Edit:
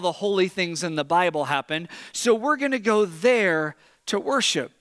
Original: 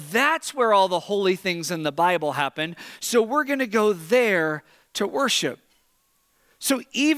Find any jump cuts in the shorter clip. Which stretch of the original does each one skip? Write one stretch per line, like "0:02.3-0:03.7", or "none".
none